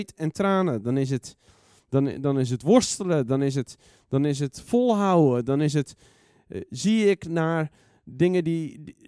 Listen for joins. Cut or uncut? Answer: uncut